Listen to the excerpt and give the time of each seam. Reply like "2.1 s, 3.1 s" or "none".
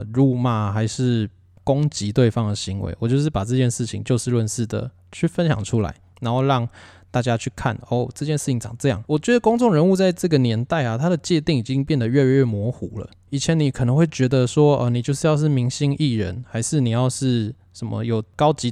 9.1 s